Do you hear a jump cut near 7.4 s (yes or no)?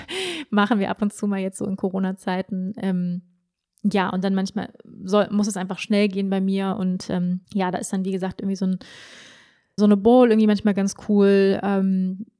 yes